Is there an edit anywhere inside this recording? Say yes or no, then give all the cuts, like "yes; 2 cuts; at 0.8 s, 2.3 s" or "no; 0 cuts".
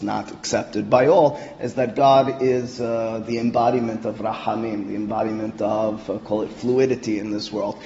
no; 0 cuts